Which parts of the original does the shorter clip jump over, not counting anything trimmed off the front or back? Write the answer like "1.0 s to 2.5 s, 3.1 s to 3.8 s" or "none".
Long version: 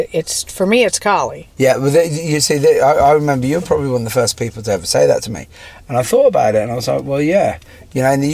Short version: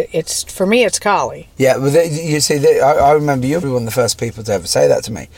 3.6 s to 3.8 s